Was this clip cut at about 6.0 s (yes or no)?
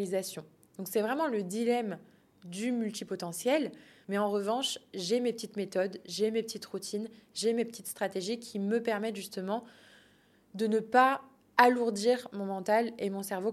no